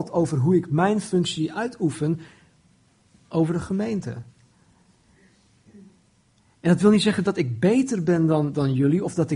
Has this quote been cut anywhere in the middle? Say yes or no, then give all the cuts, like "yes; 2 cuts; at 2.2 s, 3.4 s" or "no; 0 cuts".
no; 0 cuts